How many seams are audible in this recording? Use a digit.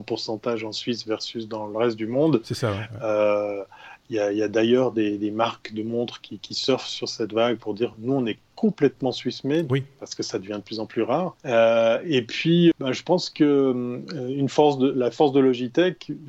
2